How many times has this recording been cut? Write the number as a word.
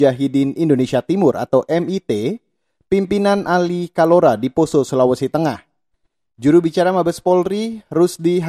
zero